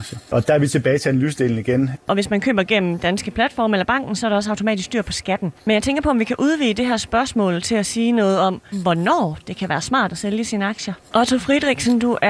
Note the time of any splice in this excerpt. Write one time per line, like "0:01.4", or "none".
0:01.9
0:08.7
0:11.1